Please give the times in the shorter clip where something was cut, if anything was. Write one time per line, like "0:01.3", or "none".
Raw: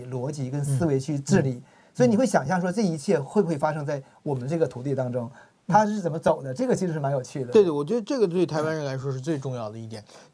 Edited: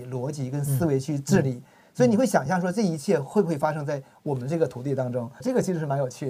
0:05.4